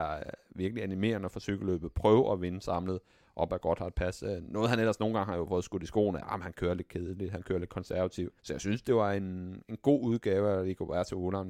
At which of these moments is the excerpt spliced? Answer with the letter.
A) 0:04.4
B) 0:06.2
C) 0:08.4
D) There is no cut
C